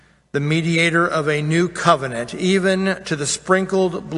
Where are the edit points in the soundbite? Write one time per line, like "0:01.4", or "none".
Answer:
none